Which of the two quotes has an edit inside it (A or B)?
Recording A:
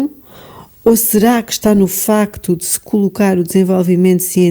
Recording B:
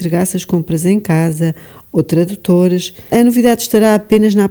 B